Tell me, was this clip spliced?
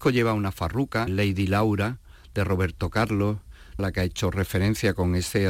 yes; 2 cuts; at 1.1 s, 3.8 s

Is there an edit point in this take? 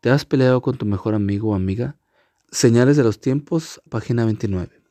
yes; 2 cuts; at 2.4 s, 3.9 s

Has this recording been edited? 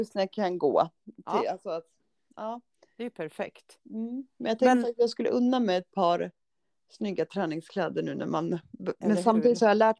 no; 0 cuts

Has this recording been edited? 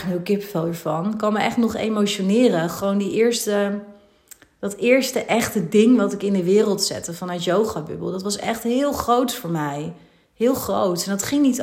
no; 0 cuts

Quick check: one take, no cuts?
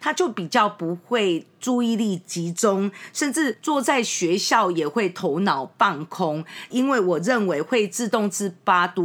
no; 1 cut; at 6.7 s

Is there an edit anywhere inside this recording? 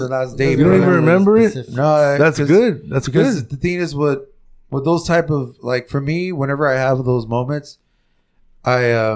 no; 0 cuts

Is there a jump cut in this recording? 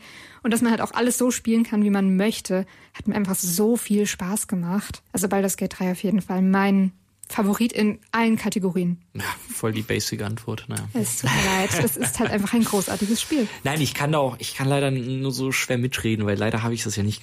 yes; 1 cut; at 5.1 s

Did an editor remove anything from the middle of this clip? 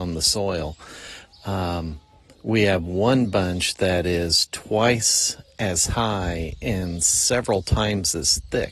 no; 0 cuts

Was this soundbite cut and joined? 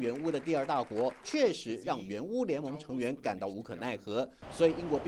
yes; 1 cut; at 1.2 s

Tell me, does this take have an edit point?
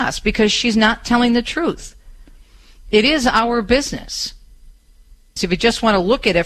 yes; 1 cut; at 5.4 s

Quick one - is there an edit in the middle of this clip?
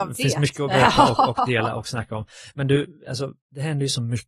no; 0 cuts

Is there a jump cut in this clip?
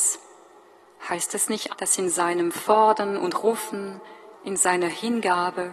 yes; 2 cuts; at 1.7 s, 4.3 s

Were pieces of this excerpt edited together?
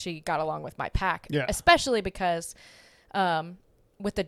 no; 0 cuts

